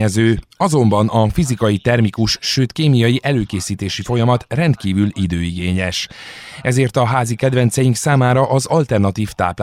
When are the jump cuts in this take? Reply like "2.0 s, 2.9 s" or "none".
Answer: none